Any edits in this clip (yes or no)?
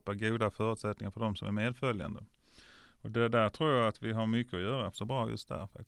yes